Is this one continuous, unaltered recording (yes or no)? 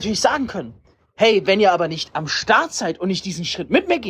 yes